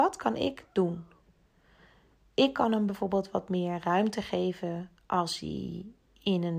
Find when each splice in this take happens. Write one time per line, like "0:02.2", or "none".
none